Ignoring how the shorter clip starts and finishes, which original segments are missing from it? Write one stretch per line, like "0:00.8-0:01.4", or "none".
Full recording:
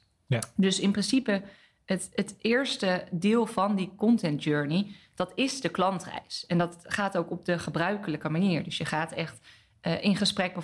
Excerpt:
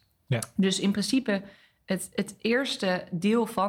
none